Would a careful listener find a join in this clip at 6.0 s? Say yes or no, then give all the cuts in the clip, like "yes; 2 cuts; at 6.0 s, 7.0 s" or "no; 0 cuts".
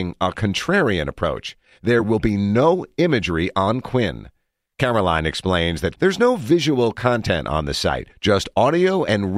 yes; 1 cut; at 6.0 s